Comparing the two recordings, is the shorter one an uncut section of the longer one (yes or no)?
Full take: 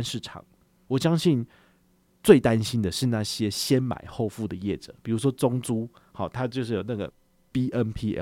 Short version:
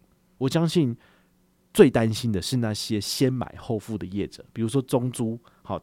yes